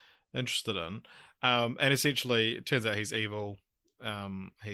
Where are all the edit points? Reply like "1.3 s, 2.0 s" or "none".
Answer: none